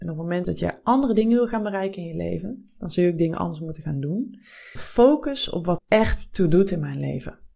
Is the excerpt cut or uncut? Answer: cut